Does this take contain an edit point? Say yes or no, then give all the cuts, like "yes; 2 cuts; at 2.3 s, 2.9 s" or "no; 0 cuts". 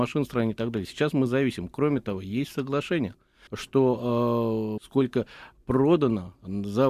yes; 2 cuts; at 3.5 s, 4.8 s